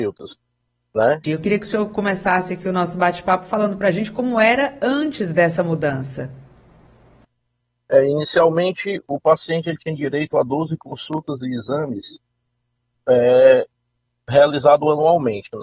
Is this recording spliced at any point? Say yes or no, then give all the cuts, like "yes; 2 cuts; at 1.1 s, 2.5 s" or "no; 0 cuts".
yes; 1 cut; at 1.2 s